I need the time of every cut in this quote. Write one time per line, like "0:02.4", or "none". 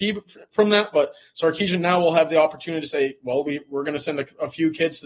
none